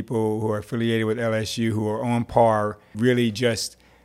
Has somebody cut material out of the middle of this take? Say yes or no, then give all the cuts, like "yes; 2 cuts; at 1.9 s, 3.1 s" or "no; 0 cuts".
yes; 1 cut; at 2.9 s